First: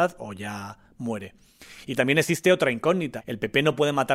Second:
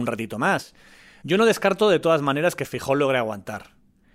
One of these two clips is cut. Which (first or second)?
second